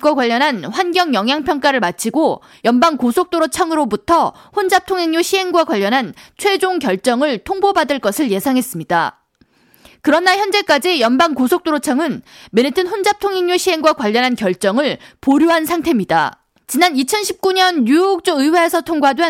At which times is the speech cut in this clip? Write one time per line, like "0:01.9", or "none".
none

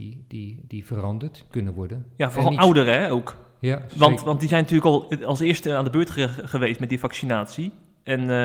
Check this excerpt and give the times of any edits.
0:01.5

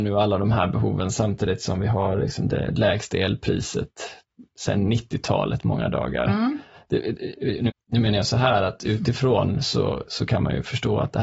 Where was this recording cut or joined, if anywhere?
0:07.7

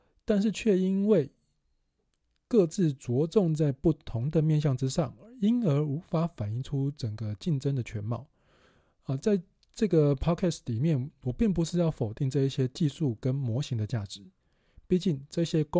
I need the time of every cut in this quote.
none

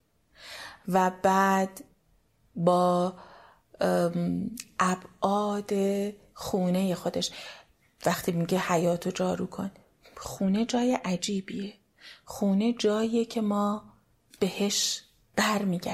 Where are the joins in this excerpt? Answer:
none

